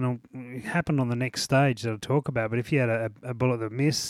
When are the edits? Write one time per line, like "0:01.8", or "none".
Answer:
none